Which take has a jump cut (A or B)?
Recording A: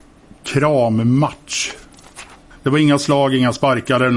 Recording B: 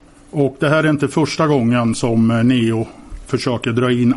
A